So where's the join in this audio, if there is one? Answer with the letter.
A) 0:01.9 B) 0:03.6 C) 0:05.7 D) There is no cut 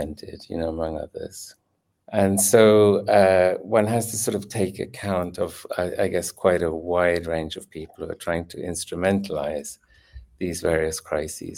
A